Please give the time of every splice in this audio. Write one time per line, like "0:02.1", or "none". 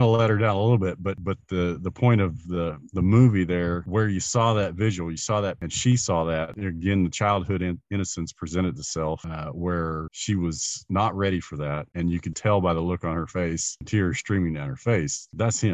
0:06.5
0:12.3